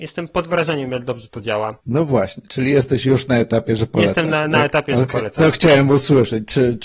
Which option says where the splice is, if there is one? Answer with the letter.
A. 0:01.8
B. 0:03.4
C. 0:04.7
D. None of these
A